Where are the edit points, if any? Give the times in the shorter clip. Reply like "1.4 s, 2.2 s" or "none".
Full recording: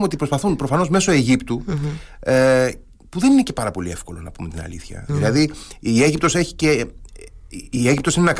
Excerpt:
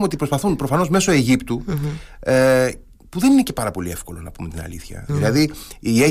none